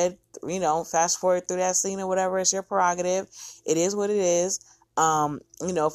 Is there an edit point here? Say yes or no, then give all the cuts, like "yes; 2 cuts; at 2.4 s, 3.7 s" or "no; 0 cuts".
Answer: no; 0 cuts